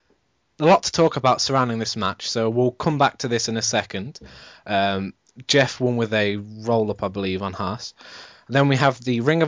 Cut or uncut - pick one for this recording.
uncut